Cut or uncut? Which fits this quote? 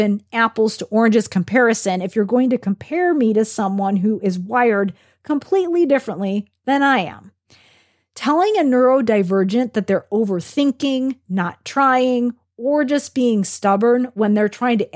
uncut